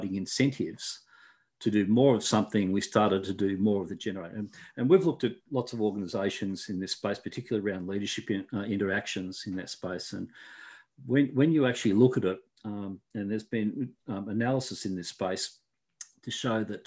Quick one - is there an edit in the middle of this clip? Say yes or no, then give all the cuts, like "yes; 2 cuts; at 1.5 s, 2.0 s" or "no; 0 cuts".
no; 0 cuts